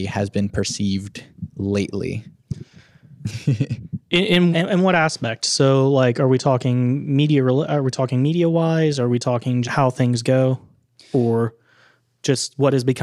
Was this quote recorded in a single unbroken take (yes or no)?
no